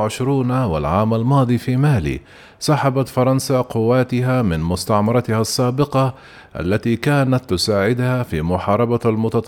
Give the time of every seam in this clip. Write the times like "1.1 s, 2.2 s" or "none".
none